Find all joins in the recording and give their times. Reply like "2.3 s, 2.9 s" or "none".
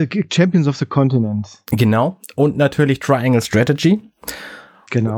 none